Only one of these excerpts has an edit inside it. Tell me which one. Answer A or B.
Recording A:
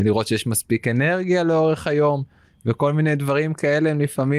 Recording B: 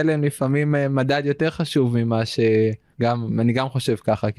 B